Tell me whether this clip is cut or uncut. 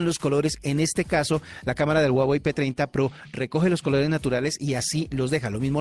uncut